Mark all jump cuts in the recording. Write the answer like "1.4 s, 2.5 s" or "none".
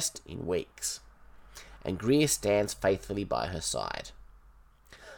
none